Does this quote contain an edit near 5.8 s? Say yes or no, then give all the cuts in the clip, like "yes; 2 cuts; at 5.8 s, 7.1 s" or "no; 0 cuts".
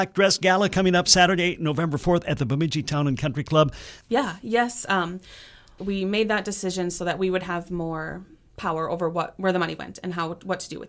yes; 2 cuts; at 4.0 s, 5.8 s